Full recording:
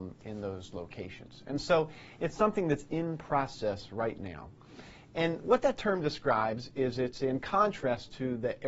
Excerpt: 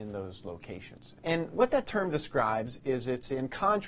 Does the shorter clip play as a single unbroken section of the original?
no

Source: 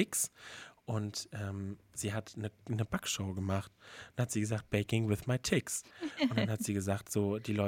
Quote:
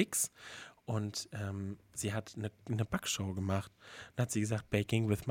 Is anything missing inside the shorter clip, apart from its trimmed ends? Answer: no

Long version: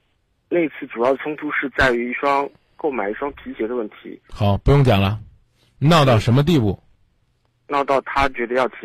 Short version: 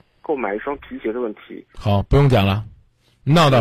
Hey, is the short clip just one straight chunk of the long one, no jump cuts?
yes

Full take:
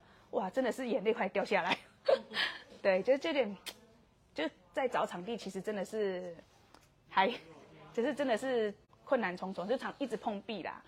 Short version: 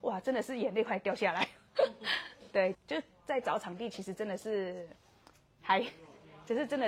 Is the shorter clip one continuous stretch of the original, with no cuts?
no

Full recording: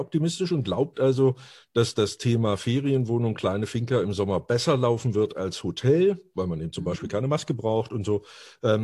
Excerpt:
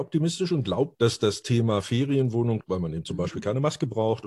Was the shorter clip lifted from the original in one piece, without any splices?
no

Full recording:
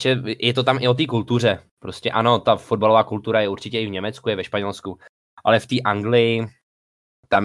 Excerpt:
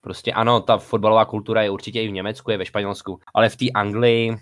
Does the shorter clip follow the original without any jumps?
no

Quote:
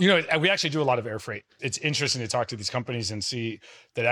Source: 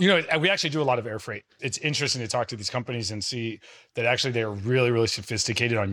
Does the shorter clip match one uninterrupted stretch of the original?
yes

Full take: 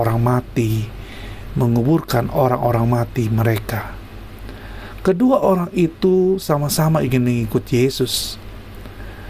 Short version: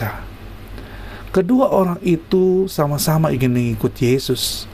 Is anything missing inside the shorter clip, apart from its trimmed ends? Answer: no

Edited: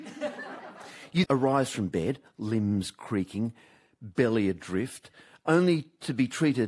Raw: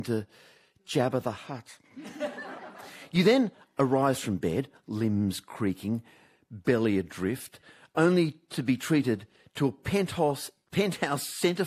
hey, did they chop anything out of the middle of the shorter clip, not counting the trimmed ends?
yes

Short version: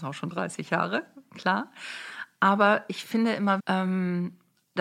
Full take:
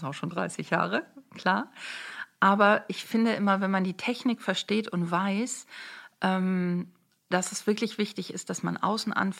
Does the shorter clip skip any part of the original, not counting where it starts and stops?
yes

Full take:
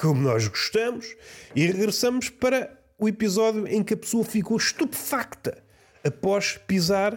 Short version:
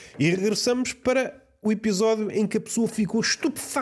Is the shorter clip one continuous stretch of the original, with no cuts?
yes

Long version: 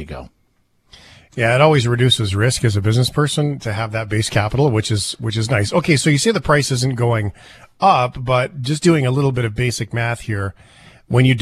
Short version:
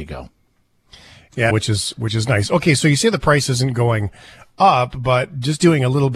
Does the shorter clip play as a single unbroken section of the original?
no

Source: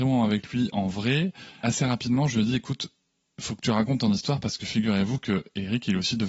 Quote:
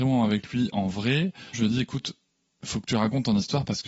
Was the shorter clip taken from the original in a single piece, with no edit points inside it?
no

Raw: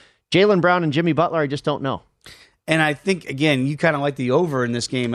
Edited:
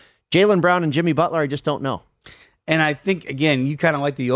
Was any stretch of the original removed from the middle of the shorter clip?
no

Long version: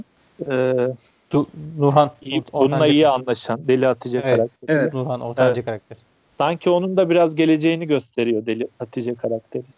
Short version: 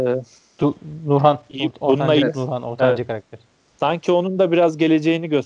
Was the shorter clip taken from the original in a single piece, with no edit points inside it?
no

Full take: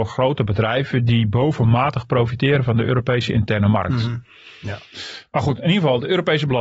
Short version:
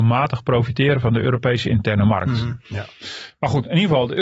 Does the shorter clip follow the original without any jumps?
no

